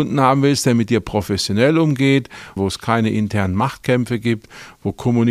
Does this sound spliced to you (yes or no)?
yes